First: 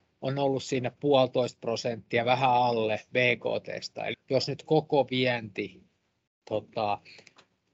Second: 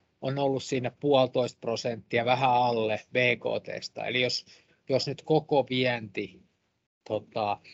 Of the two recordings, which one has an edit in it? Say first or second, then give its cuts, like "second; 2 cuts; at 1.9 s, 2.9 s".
first; 1 cut; at 4.1 s